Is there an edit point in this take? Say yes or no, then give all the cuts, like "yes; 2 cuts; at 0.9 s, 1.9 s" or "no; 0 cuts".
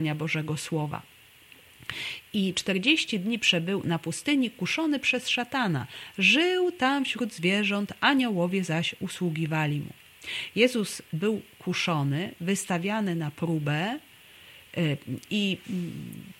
no; 0 cuts